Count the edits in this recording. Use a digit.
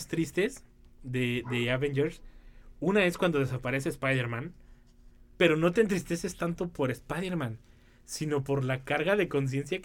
0